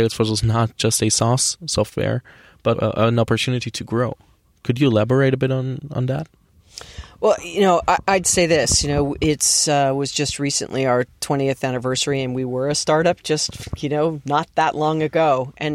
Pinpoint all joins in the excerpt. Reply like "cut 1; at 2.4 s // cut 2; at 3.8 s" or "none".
cut 1; at 2.7 s